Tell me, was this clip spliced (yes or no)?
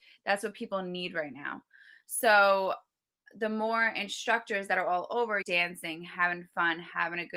yes